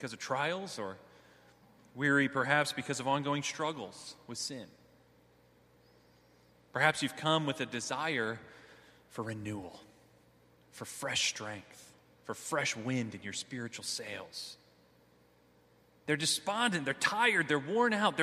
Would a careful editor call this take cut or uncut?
cut